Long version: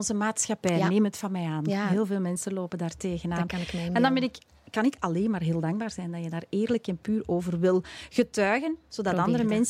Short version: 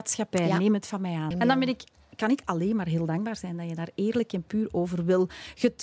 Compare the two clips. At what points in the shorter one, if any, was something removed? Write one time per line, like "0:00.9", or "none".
0:01.3